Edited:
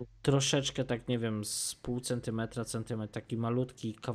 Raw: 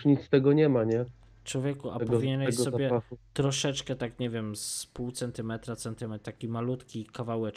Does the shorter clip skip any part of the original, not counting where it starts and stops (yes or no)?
no